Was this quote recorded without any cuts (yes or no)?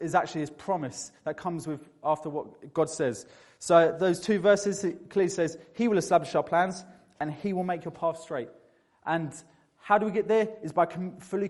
yes